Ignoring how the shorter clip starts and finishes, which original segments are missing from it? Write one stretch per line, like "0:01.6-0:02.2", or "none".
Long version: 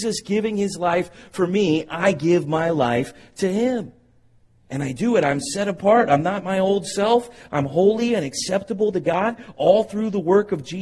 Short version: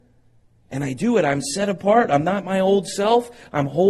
none

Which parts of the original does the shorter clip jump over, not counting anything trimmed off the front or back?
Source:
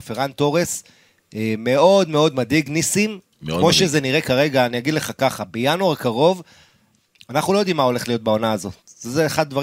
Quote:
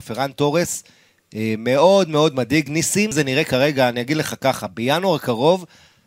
0:03.1-0:03.9

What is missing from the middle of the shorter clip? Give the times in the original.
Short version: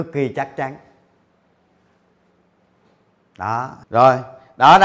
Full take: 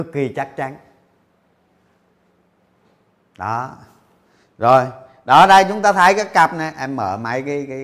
0:03.8-0:04.5

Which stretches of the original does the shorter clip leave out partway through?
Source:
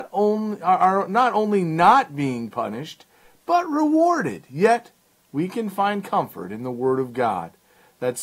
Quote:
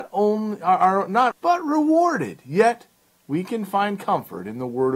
0:01.3-0:03.4

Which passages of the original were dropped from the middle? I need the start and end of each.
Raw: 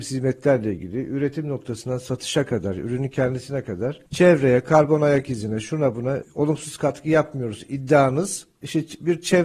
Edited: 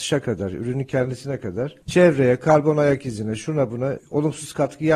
none

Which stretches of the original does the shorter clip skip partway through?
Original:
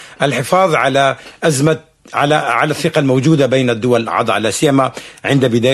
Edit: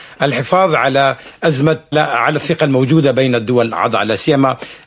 0:01.9-0:02.3

